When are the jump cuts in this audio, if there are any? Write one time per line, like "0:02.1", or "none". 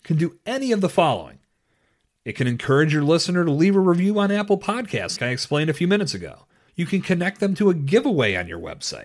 0:05.2
0:06.7